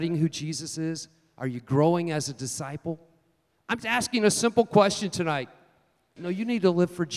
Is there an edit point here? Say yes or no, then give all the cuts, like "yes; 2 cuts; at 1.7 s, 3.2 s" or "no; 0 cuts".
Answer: yes; 2 cuts; at 3.8 s, 6.2 s